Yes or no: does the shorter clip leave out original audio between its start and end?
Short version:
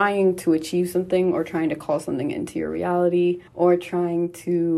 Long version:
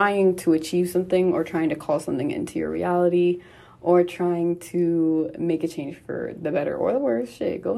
yes